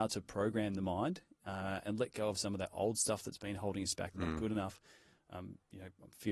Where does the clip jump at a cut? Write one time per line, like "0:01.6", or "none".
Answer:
0:01.8
0:04.1